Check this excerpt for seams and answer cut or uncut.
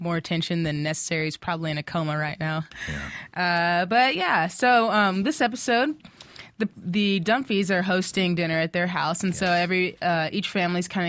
uncut